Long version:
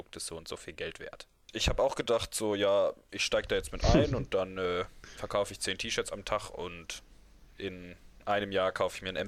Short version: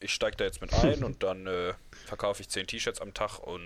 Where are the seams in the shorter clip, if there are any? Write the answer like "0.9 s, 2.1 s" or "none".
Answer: none